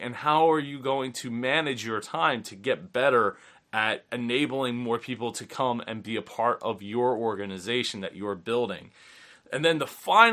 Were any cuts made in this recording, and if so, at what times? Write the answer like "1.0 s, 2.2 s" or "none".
4.1 s

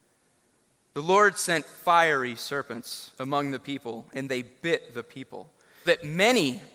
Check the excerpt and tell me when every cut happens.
5.8 s

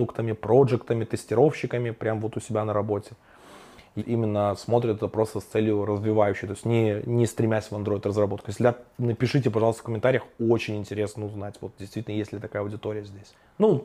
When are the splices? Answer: 4.0 s

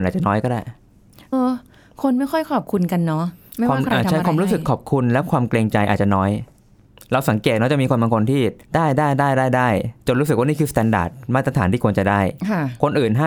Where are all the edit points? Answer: 1.3 s, 8.6 s

